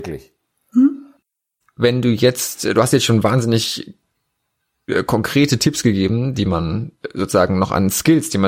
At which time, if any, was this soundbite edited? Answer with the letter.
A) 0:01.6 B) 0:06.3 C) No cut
A